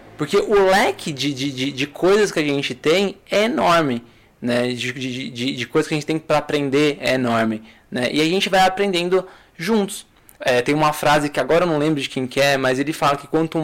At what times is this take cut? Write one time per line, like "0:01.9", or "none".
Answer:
0:10.4